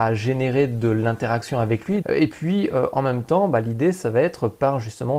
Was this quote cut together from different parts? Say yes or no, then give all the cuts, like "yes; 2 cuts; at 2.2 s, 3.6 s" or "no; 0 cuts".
yes; 1 cut; at 2.0 s